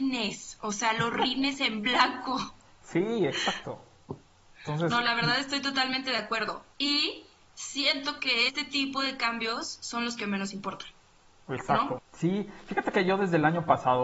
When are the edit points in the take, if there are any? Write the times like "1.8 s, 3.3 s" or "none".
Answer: 12.0 s